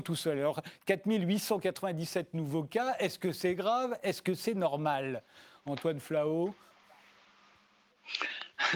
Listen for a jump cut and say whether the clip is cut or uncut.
uncut